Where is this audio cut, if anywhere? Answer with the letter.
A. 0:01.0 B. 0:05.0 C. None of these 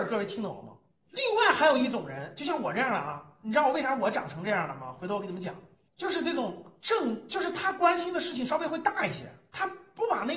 A